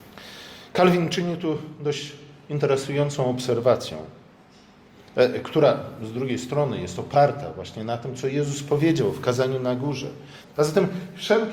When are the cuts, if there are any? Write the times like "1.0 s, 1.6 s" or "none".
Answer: 10.4 s